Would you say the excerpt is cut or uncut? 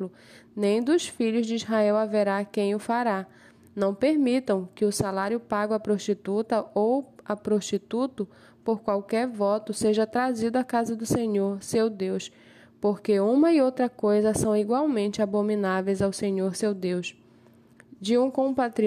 uncut